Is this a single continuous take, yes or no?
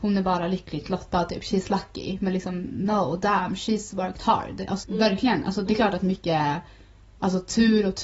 no